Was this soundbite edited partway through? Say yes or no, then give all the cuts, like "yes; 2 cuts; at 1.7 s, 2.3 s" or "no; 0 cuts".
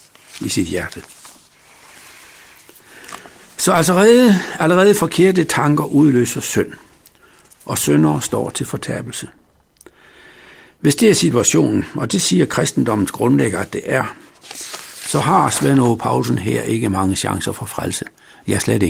no; 0 cuts